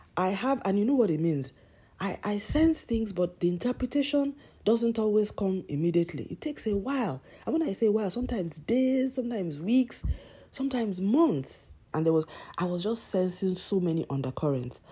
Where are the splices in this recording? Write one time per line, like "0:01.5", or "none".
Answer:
0:11.9